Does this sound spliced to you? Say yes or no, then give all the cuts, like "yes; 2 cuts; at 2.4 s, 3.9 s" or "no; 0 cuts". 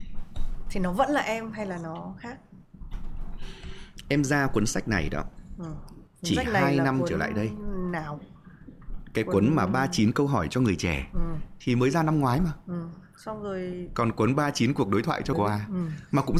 yes; 1 cut; at 15.3 s